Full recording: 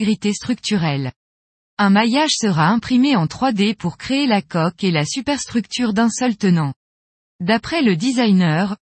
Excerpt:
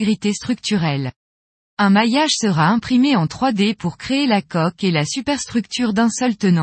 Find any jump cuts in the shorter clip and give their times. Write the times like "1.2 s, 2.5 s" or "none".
none